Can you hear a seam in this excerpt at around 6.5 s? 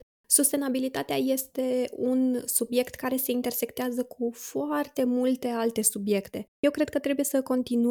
yes; 1 cut; at 6.5 s

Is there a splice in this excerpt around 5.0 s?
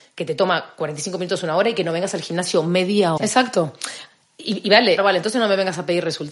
yes; 2 cuts; at 3.2 s, 5.0 s

